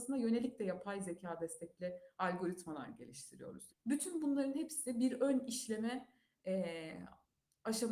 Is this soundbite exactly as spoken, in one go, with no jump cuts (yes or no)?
no